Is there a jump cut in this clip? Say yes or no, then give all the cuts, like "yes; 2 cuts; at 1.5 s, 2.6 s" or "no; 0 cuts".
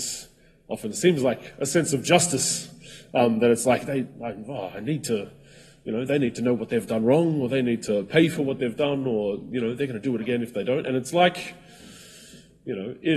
no; 0 cuts